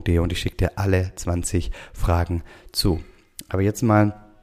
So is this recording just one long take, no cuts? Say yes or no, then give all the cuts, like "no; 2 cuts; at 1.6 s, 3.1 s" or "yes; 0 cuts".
yes; 0 cuts